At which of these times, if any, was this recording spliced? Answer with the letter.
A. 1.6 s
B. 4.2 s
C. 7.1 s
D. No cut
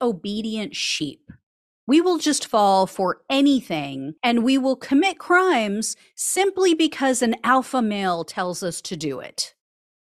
B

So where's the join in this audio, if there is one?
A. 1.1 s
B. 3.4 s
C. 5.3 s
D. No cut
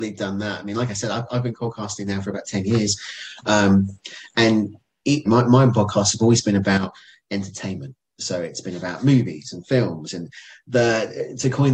C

